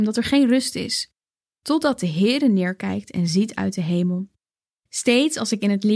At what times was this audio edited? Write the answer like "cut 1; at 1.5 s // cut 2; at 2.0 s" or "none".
cut 1; at 4.7 s